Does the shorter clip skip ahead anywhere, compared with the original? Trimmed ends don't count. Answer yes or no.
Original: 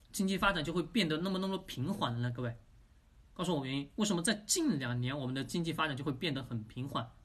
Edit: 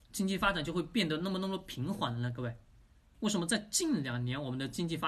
yes